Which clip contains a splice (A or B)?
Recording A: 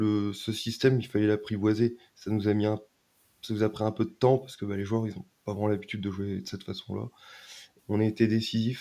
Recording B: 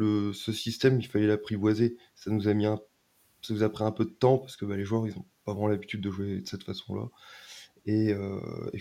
A